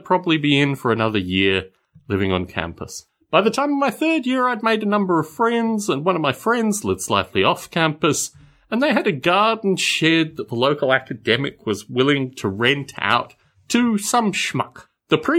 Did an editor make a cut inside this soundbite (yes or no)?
no